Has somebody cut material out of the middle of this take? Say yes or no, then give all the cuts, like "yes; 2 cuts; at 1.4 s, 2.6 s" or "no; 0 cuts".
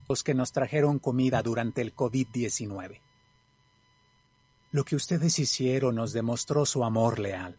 no; 0 cuts